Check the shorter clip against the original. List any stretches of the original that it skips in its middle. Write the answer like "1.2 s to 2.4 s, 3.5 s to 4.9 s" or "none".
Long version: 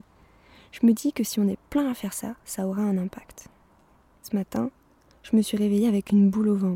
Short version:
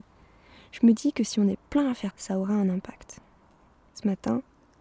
2.1 s to 2.4 s